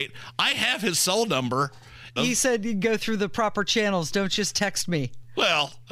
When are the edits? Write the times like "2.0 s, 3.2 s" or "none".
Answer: 2.2 s

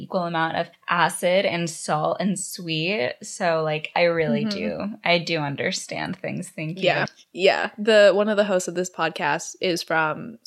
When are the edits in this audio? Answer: 7.1 s

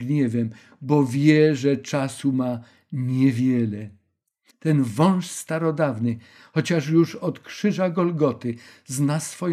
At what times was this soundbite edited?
4.5 s

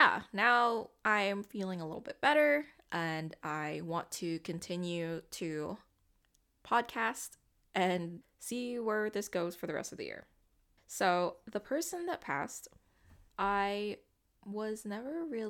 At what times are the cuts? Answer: 8.2 s, 10.8 s, 13.3 s

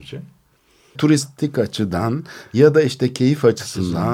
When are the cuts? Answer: 0.9 s

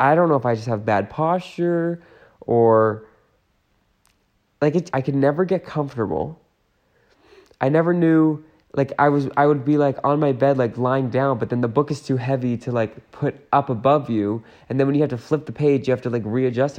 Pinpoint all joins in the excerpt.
4.9 s

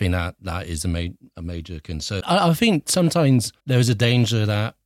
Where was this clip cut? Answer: 2.2 s, 3.6 s

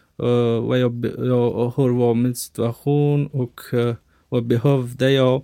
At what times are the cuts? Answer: none

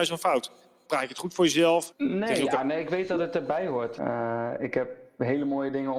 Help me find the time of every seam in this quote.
1.9 s, 4.0 s

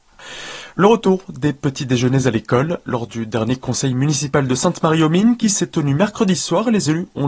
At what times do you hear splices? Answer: none

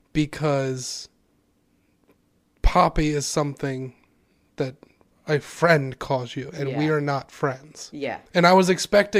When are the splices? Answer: 8.3 s

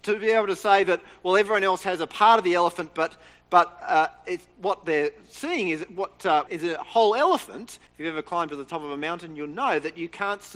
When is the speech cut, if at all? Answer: 6.5 s, 7.9 s

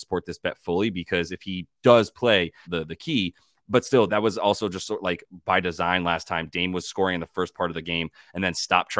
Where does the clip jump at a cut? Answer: 2.6 s, 4.1 s

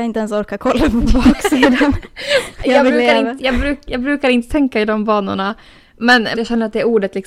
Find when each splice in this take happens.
2.6 s, 6.3 s

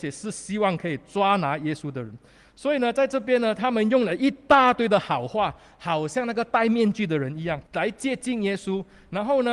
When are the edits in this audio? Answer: 7.7 s

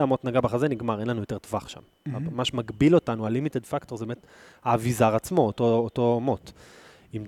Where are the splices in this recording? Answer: none

